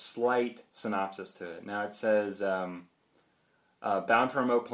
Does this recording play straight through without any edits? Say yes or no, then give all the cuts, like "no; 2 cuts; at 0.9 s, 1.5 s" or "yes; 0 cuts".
yes; 0 cuts